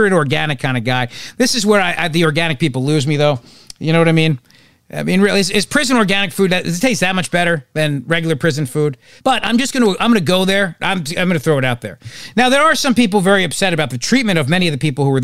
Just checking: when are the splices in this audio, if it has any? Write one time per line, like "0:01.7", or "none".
0:09.2
0:10.8